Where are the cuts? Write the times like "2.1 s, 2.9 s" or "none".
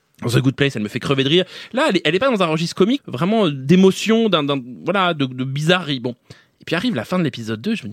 3.0 s